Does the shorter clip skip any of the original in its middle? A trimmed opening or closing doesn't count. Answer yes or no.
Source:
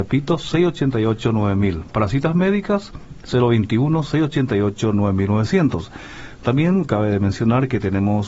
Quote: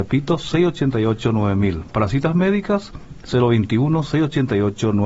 no